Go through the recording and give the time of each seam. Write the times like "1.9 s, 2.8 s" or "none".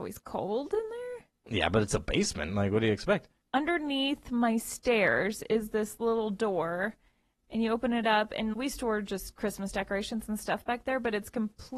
3.4 s, 8.5 s